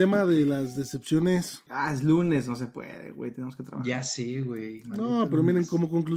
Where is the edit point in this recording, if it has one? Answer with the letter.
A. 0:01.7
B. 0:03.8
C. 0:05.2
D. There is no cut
A